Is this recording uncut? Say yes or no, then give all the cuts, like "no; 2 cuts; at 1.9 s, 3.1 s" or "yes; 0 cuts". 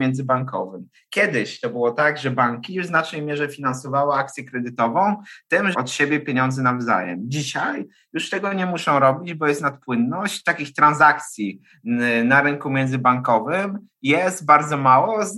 no; 1 cut; at 5.7 s